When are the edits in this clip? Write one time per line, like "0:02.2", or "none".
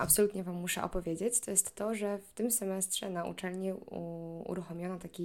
none